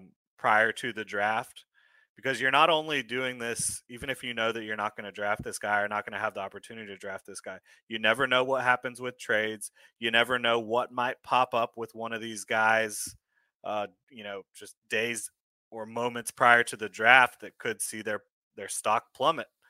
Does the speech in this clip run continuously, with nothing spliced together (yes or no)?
yes